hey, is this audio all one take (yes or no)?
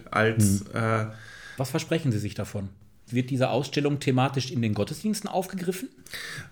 no